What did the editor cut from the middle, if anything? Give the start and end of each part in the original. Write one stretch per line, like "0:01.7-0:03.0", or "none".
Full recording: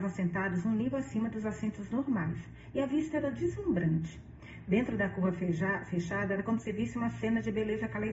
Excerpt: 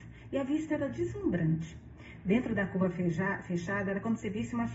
none